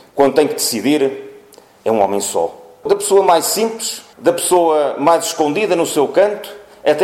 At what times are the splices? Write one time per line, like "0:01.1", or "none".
0:02.8

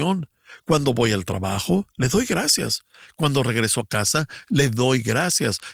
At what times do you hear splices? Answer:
none

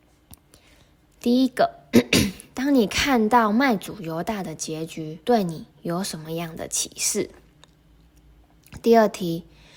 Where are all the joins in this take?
0:01.0
0:05.2

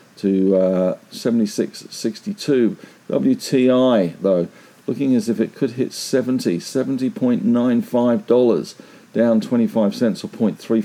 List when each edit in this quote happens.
none

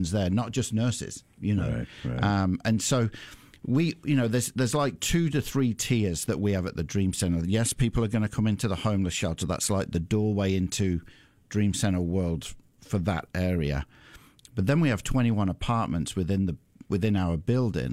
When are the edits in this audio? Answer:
none

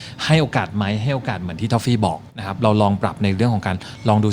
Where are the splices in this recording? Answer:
0:02.3

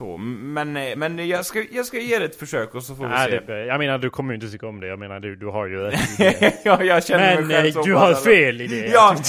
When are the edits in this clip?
none

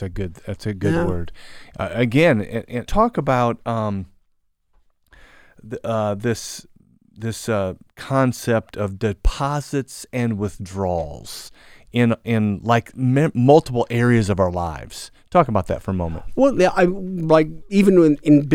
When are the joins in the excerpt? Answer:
0:02.9

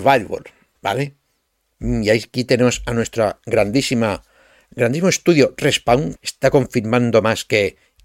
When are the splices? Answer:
0:06.2

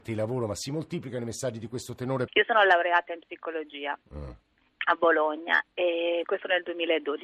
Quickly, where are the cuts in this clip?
0:02.3
0:06.2

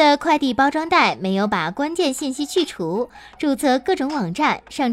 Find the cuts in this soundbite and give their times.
none

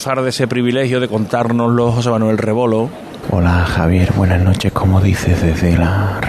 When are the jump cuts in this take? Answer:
0:03.2

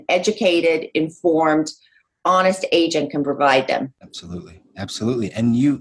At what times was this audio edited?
none

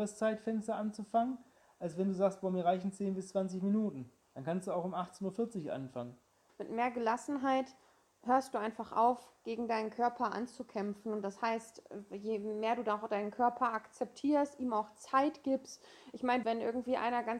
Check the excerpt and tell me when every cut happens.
0:06.5
0:16.4

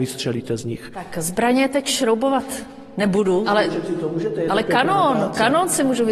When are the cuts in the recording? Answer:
0:03.4

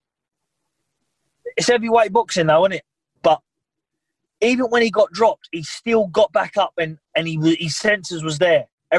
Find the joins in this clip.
0:03.2
0:07.1

